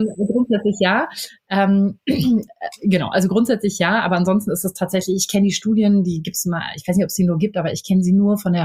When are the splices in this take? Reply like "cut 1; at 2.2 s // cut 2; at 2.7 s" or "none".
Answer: none